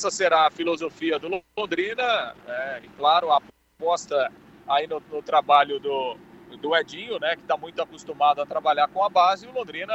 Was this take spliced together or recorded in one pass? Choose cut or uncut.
uncut